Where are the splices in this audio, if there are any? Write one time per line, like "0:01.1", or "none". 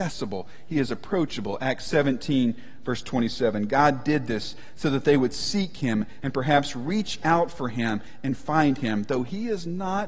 none